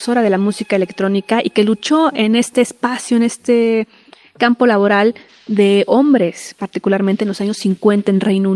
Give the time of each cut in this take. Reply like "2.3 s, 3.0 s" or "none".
none

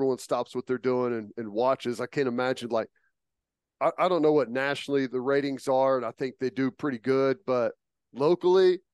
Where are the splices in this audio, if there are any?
5.1 s

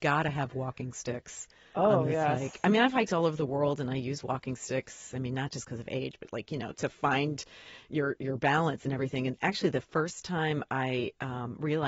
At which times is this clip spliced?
6.7 s

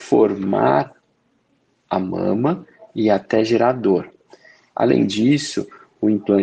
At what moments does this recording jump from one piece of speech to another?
4.7 s

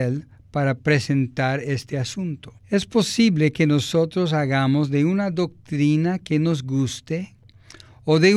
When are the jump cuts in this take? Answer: 2.6 s

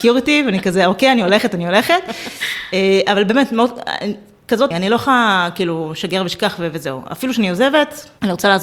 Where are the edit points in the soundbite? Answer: 4.7 s

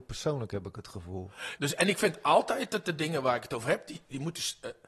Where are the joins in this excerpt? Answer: 1.6 s

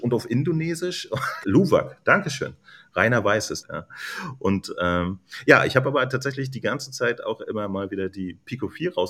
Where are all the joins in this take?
1.4 s, 3.6 s

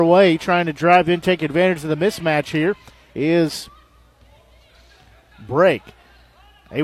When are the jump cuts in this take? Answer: none

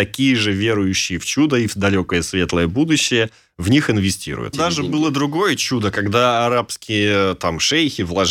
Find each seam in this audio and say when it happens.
4.5 s

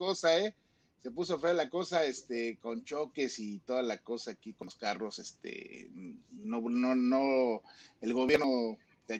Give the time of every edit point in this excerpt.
none

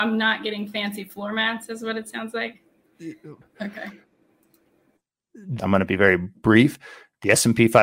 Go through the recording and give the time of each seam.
3.4 s, 5.6 s

